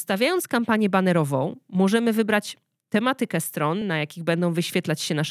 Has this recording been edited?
no; 0 cuts

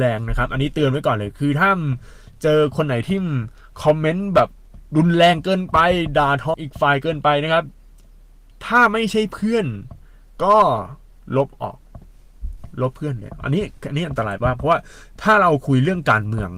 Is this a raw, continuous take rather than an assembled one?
no; 1 cut; at 6.5 s

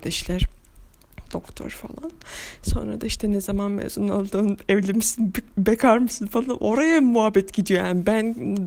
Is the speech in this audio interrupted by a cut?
no; 0 cuts

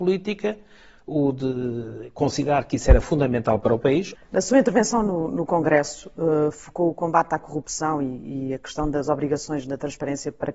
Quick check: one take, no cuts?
no; 1 cut; at 4.2 s

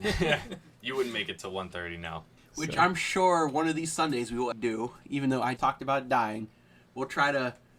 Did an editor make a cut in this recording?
yes; 3 cuts; at 2.4 s, 4.5 s, 5.6 s

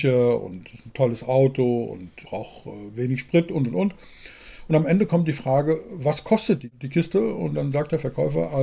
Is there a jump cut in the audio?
yes; 1 cut; at 2.2 s

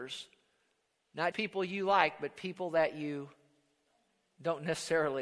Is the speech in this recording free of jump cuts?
no; 1 cut; at 1.3 s

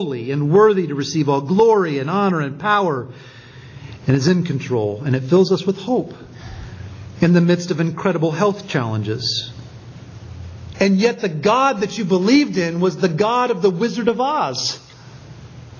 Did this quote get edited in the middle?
yes; 1 cut; at 10.7 s

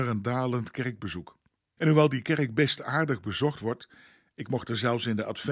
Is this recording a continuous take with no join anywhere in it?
no; 1 cut; at 1.8 s

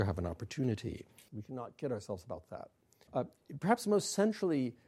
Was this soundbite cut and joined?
yes; 2 cuts; at 1.3 s, 3.1 s

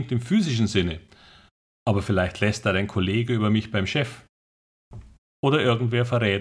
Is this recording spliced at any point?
no; 0 cuts

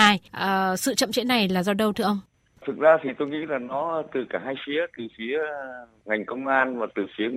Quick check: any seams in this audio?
no; 0 cuts

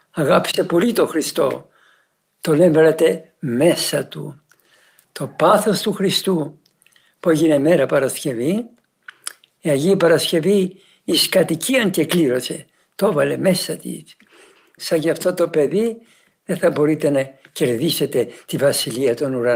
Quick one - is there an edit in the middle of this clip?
yes; 2 cuts; at 5.0 s, 14.8 s

